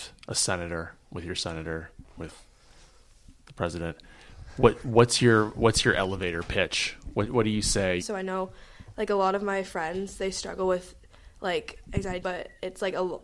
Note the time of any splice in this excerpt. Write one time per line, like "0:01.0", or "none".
0:08.0
0:12.2